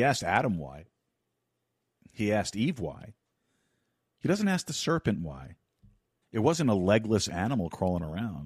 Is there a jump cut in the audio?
yes; 1 cut; at 6.2 s

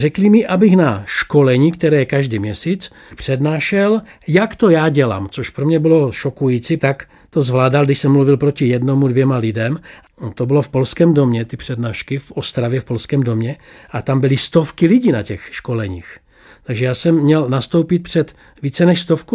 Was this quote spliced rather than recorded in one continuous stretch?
yes; 1 cut; at 6.8 s

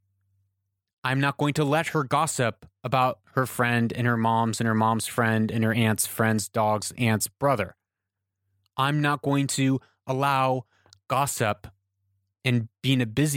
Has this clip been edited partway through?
no; 0 cuts

